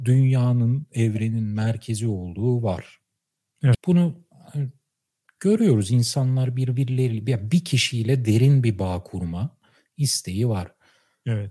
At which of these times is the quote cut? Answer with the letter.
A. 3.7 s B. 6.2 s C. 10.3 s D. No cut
A